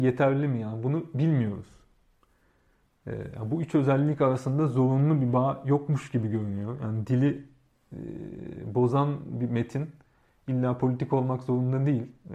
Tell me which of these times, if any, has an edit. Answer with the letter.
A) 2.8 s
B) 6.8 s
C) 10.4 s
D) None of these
D